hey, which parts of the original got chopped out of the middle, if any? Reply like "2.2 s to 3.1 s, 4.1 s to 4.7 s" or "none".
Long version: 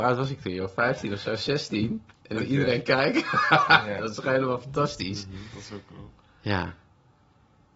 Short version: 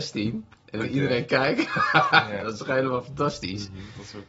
none